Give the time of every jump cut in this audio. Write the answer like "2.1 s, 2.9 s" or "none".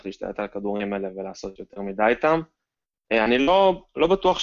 none